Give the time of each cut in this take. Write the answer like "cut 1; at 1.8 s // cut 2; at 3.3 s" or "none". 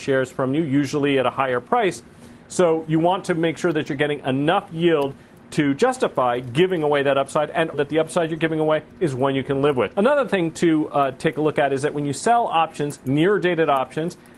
cut 1; at 7.7 s // cut 2; at 9.9 s